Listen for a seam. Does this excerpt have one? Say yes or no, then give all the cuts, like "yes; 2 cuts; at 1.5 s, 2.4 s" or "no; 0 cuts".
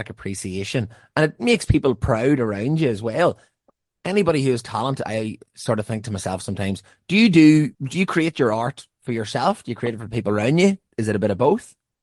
yes; 1 cut; at 7.7 s